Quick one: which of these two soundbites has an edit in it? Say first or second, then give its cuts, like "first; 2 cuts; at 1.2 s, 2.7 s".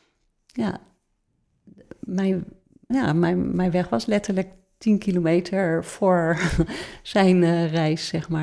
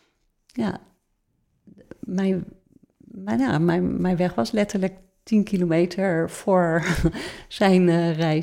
first; 1 cut; at 2.9 s